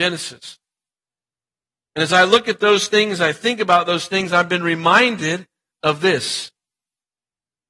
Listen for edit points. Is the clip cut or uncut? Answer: uncut